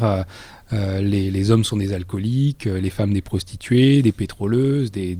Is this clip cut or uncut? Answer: uncut